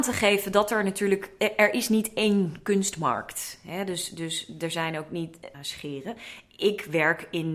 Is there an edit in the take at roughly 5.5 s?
yes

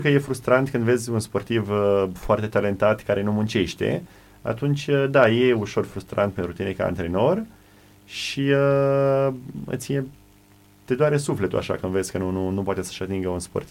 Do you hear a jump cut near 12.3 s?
no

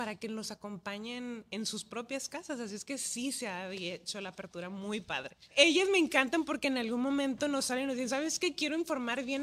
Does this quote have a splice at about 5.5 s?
yes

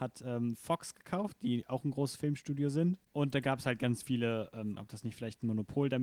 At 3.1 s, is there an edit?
no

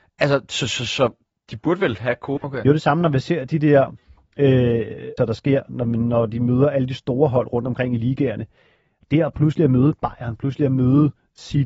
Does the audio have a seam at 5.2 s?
yes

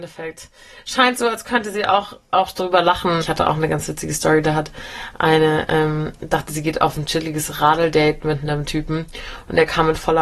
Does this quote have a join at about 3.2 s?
yes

